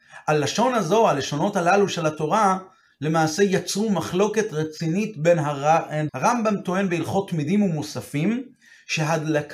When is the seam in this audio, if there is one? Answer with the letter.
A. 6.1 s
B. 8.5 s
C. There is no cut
A